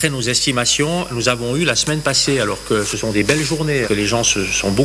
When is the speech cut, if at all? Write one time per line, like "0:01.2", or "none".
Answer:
0:03.8